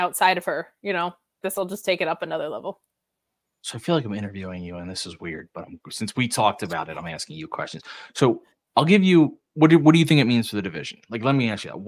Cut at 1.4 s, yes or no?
yes